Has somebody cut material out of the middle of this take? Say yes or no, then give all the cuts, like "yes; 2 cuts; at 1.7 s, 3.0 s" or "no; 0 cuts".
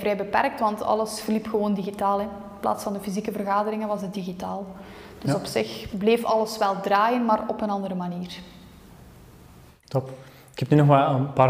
no; 0 cuts